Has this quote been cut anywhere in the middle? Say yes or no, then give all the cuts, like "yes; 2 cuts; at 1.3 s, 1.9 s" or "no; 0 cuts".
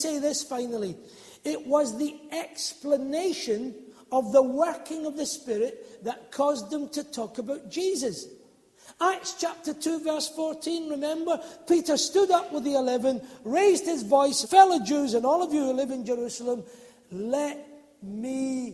yes; 1 cut; at 14.4 s